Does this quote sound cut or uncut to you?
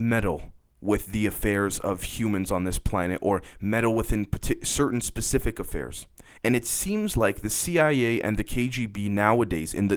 cut